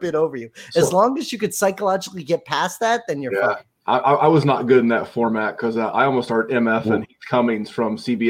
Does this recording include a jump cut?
no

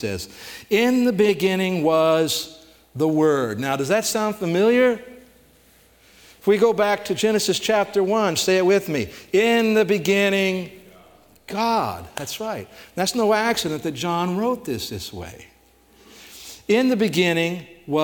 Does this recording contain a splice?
no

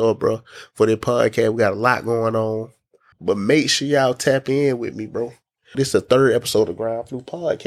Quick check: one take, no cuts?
no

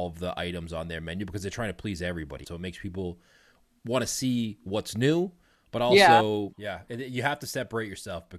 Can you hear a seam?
yes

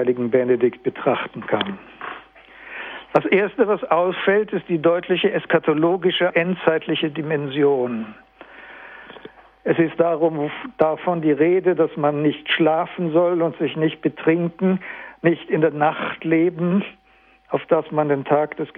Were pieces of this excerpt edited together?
yes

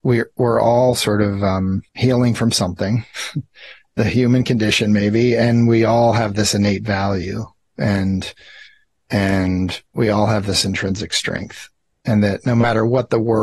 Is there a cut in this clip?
yes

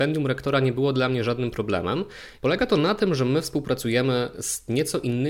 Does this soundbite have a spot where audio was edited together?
yes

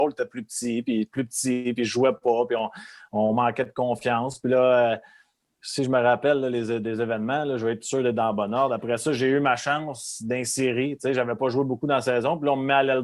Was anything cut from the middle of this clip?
no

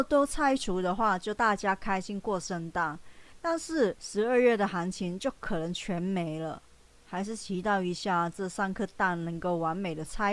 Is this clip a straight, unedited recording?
no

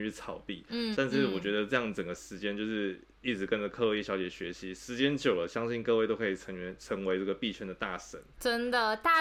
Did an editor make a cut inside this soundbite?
yes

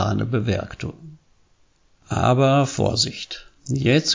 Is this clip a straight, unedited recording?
yes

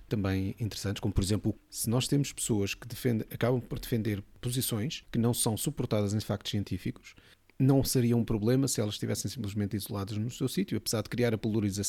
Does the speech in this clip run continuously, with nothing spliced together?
yes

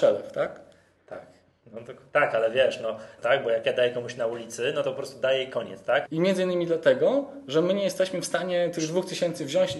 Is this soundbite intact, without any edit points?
no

